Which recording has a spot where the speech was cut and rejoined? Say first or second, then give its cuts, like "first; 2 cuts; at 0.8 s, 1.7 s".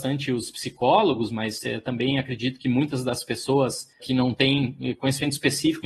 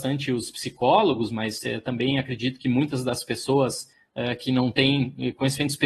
first; 1 cut; at 4.0 s